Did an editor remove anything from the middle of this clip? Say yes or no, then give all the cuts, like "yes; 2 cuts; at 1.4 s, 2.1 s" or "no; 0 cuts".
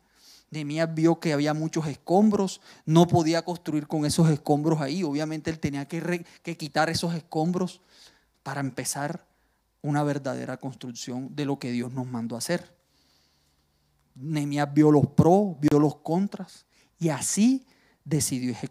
yes; 1 cut; at 8.3 s